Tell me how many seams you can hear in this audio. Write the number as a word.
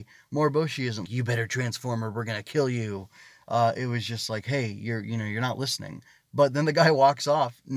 one